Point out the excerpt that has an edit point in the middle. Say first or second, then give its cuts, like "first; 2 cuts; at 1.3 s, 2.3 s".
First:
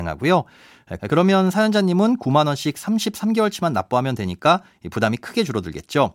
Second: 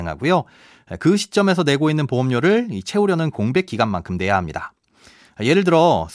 first; 1 cut; at 1.0 s